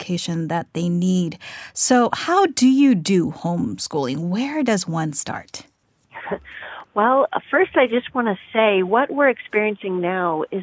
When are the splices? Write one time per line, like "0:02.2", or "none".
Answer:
none